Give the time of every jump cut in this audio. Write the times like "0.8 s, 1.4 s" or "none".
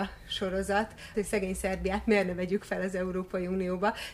1.1 s